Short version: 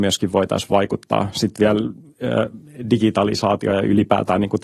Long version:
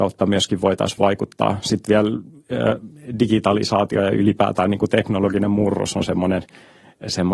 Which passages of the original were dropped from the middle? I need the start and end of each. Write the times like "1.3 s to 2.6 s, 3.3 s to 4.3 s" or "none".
none

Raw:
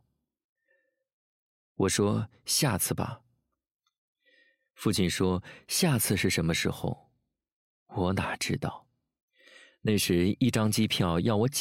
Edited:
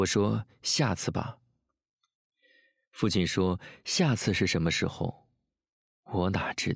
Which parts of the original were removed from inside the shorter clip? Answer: none

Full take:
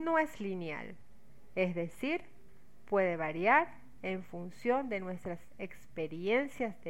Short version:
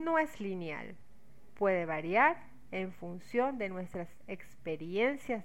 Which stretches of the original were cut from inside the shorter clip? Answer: 1.5 s to 2.8 s

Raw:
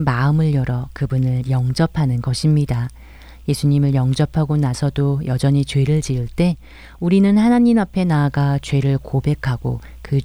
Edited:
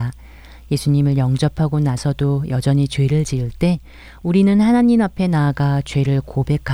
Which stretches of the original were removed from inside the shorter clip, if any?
none

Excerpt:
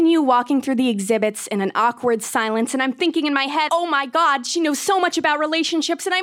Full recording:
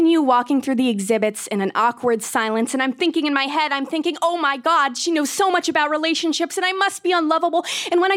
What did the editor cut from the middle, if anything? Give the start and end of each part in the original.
3.7 s to 4.2 s

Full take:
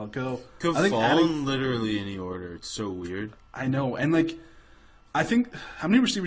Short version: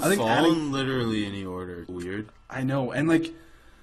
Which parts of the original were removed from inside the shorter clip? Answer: 2.6 s to 2.9 s

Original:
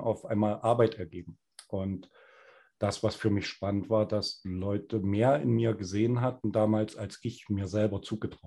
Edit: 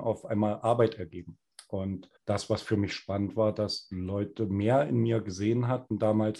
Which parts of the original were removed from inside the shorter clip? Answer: 2.2 s to 2.7 s

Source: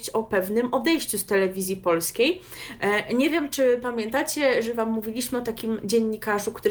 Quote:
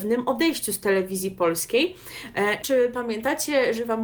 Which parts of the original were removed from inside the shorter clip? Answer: 3.1 s to 3.5 s

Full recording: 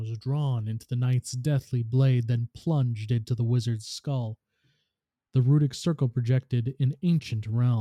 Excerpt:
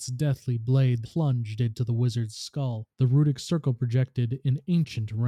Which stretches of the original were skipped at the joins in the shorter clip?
2.3 s to 2.5 s, 4.4 s to 5.3 s

